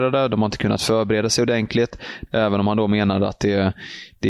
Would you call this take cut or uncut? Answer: cut